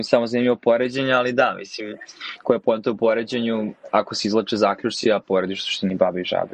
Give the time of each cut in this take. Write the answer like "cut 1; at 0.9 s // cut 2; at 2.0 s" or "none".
none